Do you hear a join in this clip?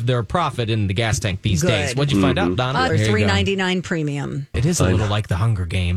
yes; 2 cuts; at 2.9 s, 4.5 s

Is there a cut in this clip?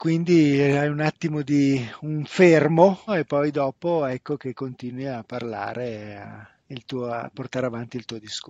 yes; 2 cuts; at 3.1 s, 6.6 s

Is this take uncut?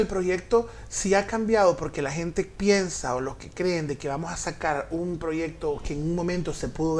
yes; 0 cuts

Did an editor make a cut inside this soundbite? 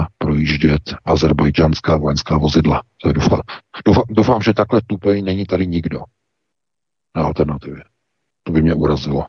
no; 0 cuts

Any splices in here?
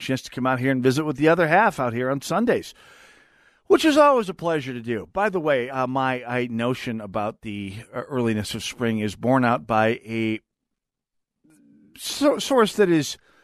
no; 0 cuts

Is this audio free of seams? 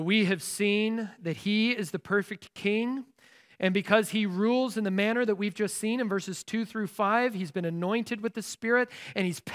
yes; 0 cuts

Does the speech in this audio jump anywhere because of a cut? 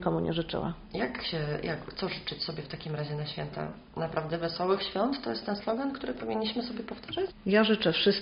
yes; 1 cut; at 7.3 s

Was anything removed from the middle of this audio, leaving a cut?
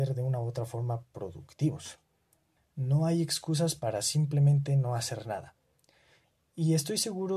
yes; 1 cut; at 2.6 s

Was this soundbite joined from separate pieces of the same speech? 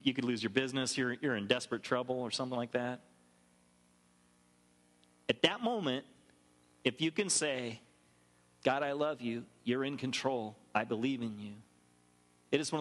no; 0 cuts

